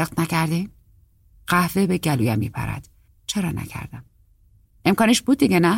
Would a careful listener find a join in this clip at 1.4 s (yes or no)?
no